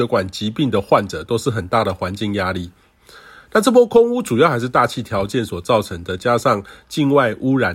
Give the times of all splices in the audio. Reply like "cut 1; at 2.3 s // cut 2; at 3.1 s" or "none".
none